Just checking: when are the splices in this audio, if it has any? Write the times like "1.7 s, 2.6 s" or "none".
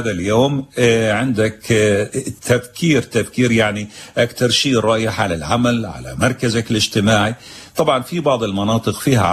none